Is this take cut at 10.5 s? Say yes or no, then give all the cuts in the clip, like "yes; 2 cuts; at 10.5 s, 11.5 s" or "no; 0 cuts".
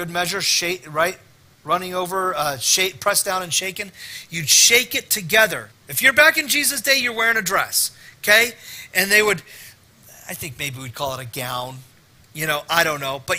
no; 1 cut; at 5.7 s